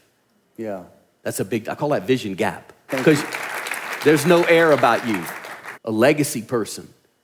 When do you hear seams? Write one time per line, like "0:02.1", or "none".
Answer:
0:02.9
0:05.7